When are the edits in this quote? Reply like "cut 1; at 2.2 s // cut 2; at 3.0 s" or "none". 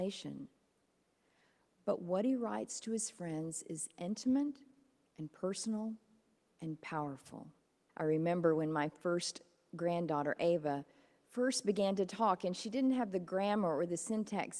cut 1; at 7.9 s